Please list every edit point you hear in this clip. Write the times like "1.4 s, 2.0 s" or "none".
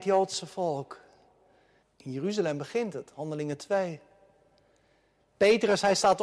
1.8 s